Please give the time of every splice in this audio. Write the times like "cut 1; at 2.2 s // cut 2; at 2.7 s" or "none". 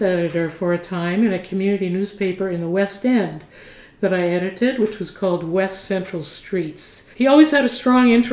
cut 1; at 7.1 s